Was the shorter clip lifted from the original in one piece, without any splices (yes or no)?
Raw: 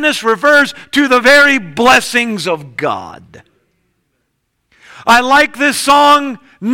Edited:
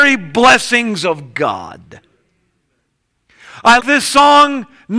no